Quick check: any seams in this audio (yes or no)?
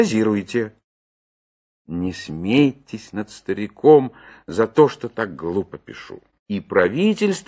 yes